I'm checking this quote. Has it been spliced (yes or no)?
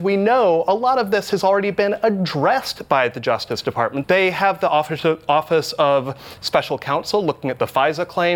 yes